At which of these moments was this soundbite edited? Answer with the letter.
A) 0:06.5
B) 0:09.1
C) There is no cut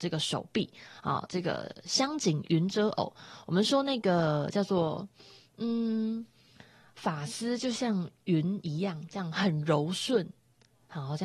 C